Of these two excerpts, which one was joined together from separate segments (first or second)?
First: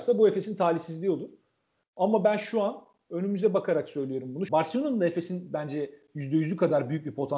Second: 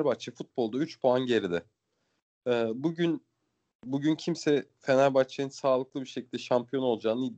first